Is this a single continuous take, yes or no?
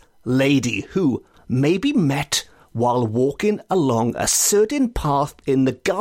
no